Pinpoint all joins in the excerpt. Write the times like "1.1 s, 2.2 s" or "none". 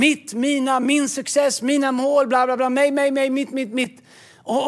none

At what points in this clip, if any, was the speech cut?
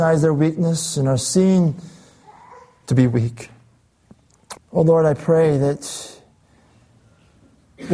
4.6 s

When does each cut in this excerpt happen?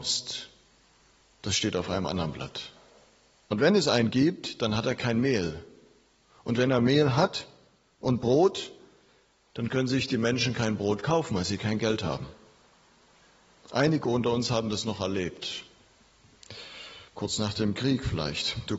3.5 s, 17.1 s

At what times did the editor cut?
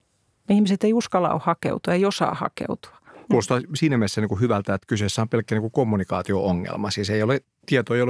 none

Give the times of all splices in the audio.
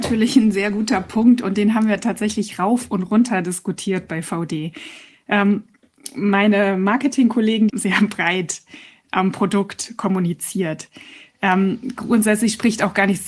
7.7 s

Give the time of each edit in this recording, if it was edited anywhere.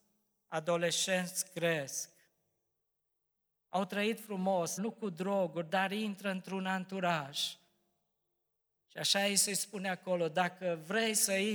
4.8 s

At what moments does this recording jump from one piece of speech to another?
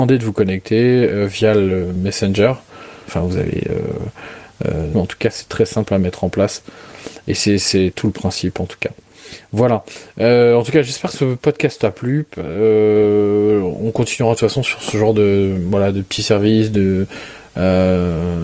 3.1 s, 4.9 s

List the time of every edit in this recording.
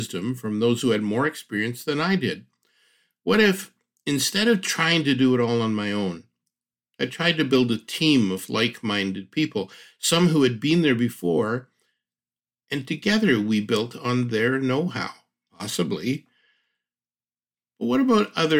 15.5 s

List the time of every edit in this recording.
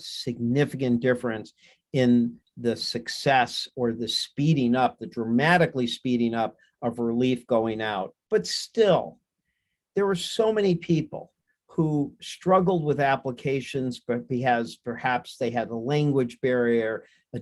none

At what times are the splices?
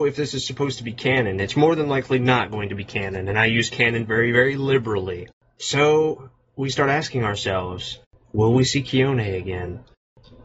none

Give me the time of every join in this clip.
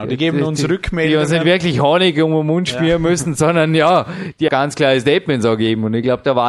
4.5 s

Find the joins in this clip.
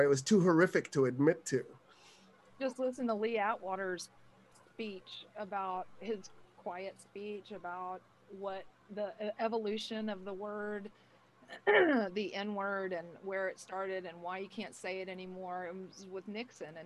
none

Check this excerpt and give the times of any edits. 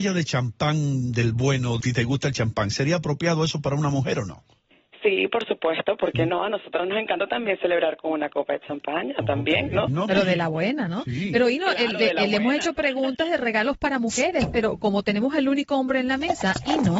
1.8 s, 9.9 s

